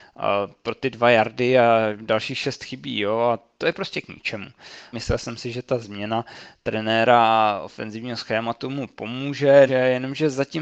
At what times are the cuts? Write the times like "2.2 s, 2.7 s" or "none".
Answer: 4.9 s, 9.7 s